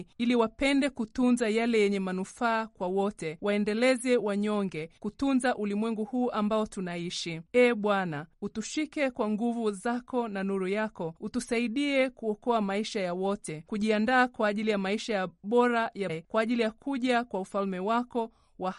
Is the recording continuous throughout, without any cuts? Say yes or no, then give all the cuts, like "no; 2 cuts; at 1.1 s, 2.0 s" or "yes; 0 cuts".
no; 2 cuts; at 7.5 s, 16.1 s